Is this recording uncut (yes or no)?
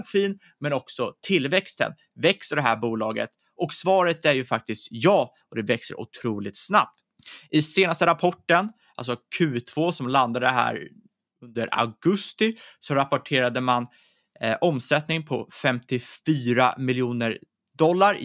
yes